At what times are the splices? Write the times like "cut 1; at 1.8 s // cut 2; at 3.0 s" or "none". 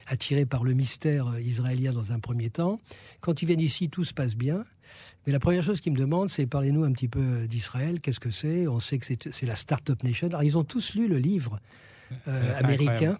none